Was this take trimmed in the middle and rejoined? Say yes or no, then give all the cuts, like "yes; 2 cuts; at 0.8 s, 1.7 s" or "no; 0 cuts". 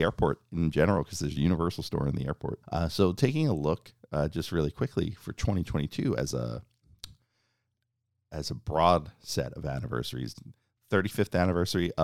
yes; 1 cut; at 2.6 s